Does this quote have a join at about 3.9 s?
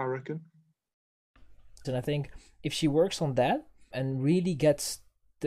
yes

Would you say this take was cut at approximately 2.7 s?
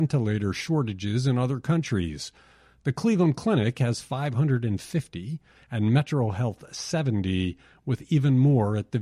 no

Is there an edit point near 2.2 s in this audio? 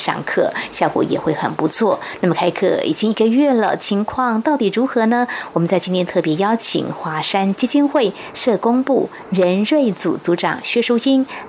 no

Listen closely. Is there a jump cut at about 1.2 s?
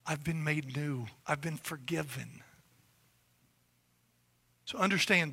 yes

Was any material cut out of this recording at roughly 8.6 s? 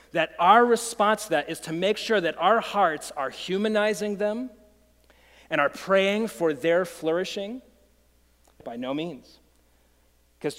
yes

